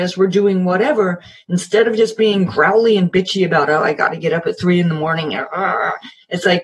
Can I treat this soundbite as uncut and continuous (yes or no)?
yes